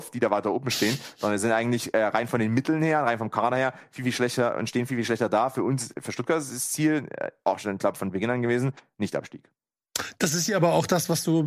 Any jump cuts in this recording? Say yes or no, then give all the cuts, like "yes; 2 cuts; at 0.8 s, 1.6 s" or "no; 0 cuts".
no; 0 cuts